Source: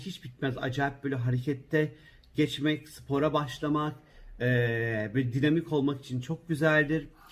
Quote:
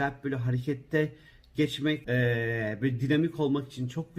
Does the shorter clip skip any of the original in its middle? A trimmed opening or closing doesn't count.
yes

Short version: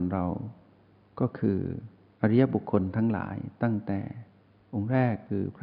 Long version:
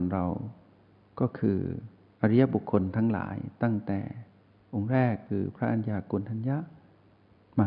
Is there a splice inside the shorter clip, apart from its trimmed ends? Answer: no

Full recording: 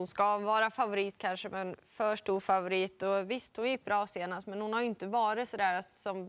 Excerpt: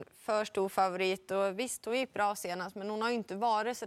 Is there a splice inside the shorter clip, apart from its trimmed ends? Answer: no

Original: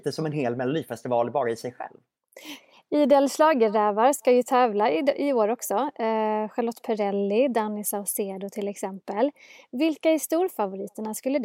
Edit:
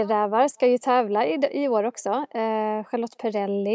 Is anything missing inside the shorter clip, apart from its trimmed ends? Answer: no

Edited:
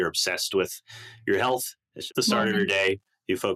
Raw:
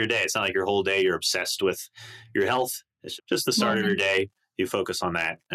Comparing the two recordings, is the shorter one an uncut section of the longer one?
no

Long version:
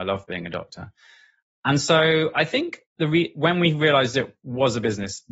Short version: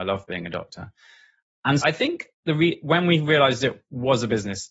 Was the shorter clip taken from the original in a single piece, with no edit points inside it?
no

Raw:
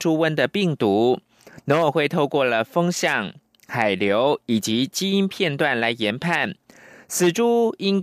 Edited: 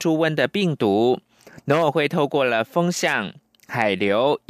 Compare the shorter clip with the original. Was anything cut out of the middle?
no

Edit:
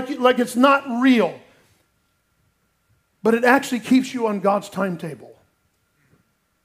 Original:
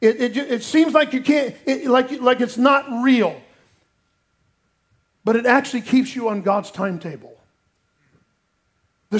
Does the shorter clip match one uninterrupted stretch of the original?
yes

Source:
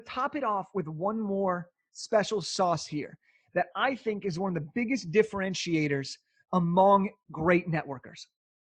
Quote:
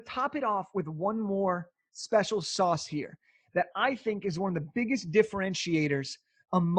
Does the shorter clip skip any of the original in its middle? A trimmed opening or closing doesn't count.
no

